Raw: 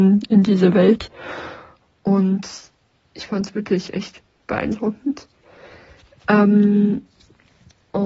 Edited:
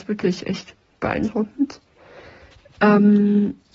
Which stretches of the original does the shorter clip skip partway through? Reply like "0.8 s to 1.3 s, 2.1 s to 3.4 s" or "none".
none